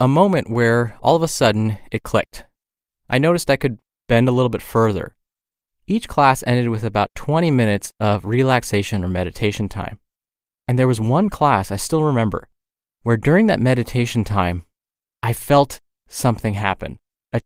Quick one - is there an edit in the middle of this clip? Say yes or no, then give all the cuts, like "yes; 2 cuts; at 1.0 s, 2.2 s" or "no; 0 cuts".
no; 0 cuts